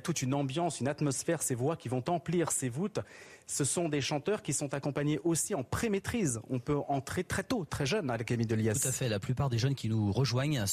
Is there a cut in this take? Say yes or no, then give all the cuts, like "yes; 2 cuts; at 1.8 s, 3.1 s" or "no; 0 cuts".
no; 0 cuts